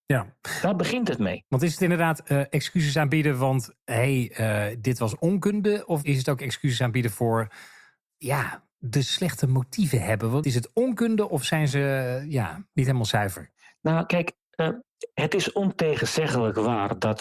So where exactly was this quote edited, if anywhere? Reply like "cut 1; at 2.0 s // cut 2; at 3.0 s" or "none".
cut 1; at 10.4 s